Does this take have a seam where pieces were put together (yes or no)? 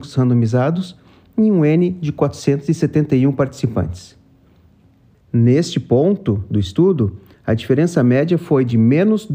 yes